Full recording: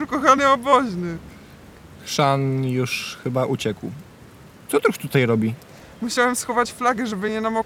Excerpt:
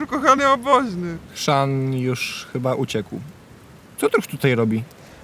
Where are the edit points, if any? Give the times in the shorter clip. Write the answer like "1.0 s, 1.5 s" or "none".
1.2 s